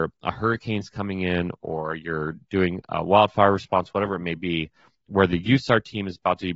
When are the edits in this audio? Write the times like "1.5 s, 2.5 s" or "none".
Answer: none